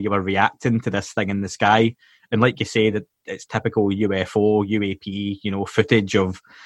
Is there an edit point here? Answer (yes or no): no